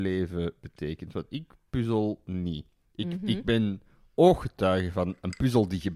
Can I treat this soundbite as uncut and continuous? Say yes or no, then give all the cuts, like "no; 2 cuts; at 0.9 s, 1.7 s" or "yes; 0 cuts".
yes; 0 cuts